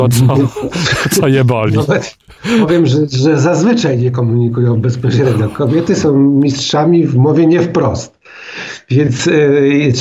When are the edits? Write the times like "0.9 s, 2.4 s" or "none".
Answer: none